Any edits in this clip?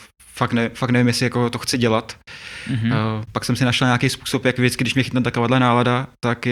yes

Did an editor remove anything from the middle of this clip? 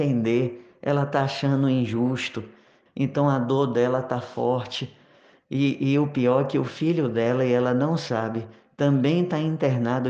yes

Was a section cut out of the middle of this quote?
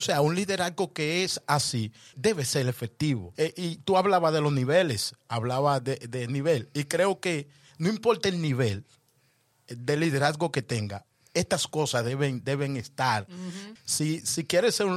yes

